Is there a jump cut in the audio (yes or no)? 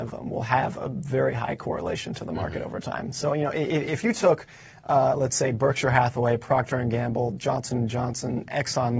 no